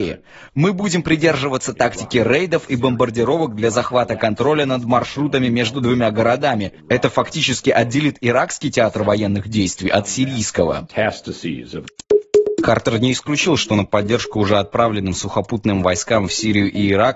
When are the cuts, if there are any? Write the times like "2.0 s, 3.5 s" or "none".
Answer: none